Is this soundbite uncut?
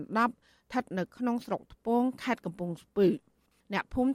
yes; 0 cuts

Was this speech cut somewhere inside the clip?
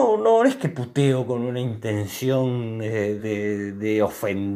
yes; 1 cut; at 3.2 s

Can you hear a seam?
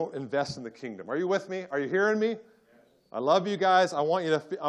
no; 0 cuts

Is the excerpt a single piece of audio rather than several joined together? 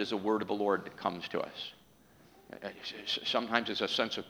yes; 0 cuts

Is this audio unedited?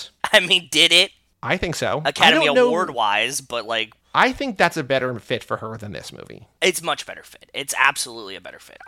yes; 0 cuts

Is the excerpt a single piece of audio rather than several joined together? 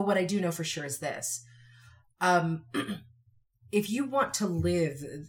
yes; 0 cuts

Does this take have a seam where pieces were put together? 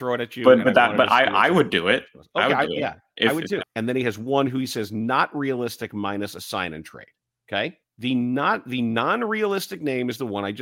yes; 2 cuts; at 3.6 s, 7.8 s

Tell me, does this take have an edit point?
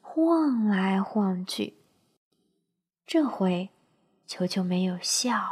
no; 0 cuts

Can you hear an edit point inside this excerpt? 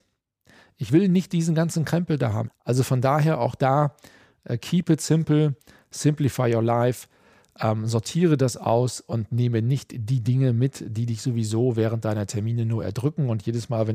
yes; 1 cut; at 2.4 s

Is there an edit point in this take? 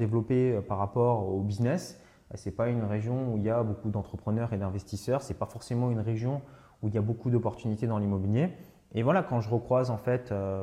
no; 0 cuts

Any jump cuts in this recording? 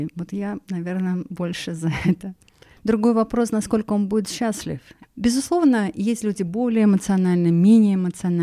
yes; 2 cuts; at 2.8 s, 5.0 s

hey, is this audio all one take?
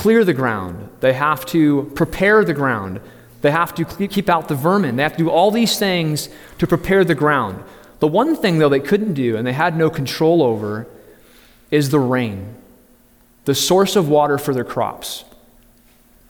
yes; 0 cuts

